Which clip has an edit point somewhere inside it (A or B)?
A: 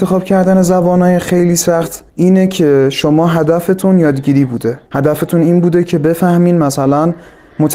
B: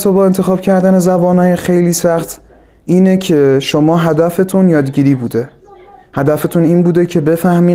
A